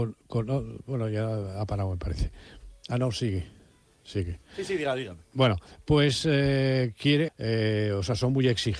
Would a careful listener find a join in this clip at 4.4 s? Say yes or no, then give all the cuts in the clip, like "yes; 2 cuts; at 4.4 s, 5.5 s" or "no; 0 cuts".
no; 1 cut; at 7.3 s